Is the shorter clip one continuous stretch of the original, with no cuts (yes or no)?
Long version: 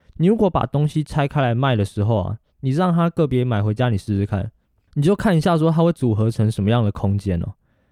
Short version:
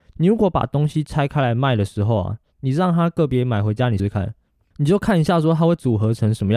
no